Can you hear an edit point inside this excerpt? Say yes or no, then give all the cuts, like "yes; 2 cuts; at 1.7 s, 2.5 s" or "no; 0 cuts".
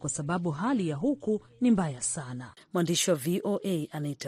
yes; 1 cut; at 2.6 s